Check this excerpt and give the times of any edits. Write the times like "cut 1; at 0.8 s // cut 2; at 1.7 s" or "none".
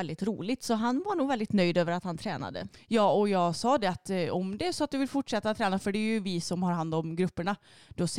none